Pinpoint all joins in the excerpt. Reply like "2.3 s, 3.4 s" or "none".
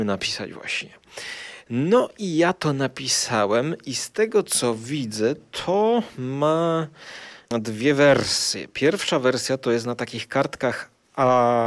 none